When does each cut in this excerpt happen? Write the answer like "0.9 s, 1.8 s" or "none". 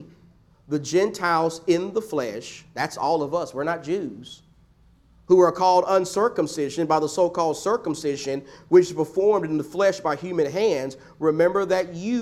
none